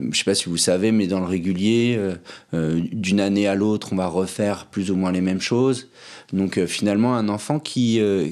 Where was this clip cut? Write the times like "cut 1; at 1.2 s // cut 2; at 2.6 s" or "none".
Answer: none